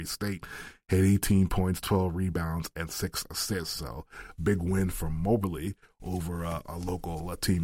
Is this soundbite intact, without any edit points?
yes; 0 cuts

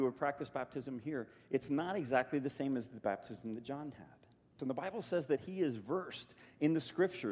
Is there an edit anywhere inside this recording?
yes; 1 cut; at 4.6 s

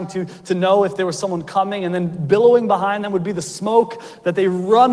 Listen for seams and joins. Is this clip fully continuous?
yes; 0 cuts

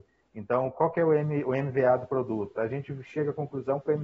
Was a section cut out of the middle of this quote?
no; 0 cuts

